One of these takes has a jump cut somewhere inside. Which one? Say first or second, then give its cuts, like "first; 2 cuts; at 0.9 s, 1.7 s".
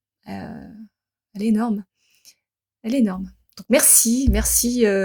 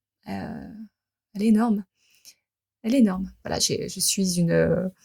second; 1 cut; at 3.4 s